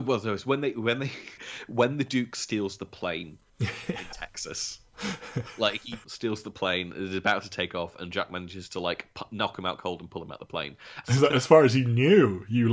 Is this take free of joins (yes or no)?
no